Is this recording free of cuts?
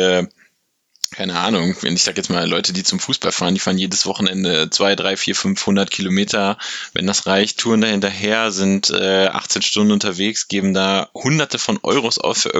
no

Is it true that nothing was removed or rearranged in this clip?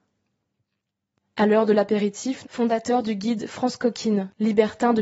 no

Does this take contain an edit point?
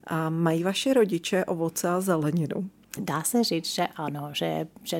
yes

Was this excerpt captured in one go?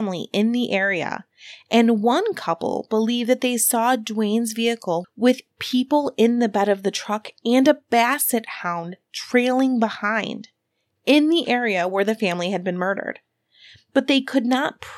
no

